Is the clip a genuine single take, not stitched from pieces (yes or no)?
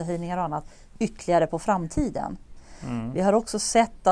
yes